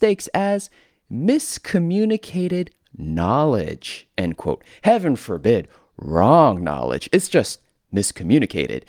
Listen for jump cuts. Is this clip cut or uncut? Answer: uncut